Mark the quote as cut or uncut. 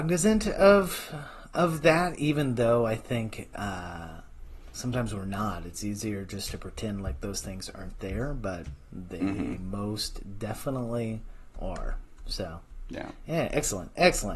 uncut